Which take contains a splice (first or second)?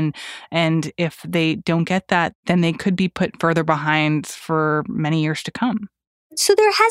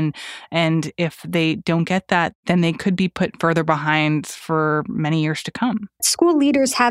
second